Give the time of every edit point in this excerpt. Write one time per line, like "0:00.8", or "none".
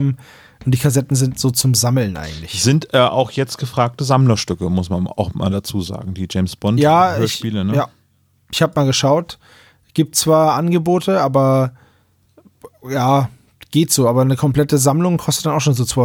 none